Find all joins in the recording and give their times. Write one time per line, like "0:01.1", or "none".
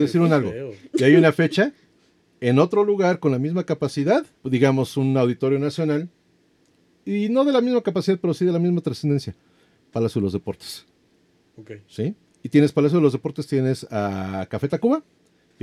0:04.4